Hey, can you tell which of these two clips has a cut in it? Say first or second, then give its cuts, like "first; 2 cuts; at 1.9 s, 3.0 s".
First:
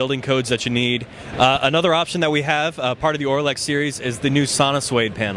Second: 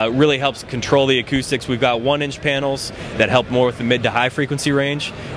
first; 1 cut; at 1.3 s